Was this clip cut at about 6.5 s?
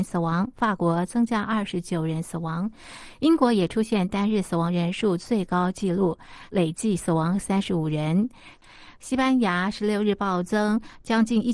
yes; 1 cut; at 6.5 s

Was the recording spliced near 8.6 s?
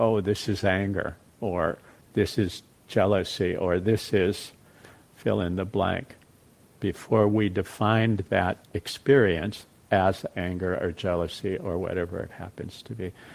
yes; 1 cut; at 8.6 s

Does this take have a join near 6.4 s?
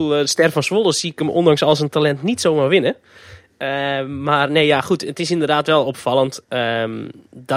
no; 0 cuts

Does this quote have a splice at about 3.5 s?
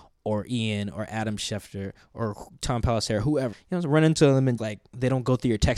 yes; 2 cuts; at 3.5 s, 4.6 s

